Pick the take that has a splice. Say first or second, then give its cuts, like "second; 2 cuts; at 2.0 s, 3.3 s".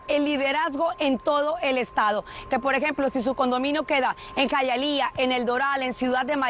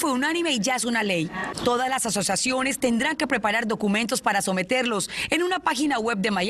first; 1 cut; at 2.5 s